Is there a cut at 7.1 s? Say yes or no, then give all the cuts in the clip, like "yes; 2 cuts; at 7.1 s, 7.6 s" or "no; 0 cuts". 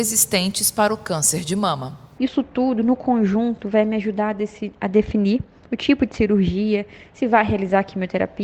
no; 1 cut; at 2.2 s